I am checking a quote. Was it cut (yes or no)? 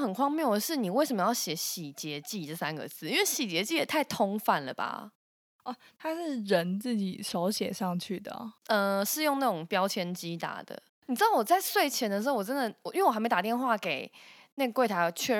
yes